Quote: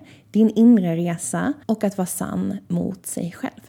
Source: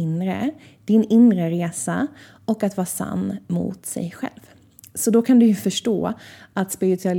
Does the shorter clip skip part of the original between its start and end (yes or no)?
yes